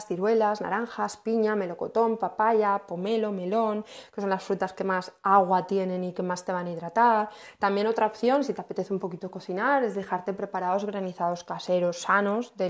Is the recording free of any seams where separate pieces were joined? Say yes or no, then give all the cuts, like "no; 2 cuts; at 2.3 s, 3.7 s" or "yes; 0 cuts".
yes; 0 cuts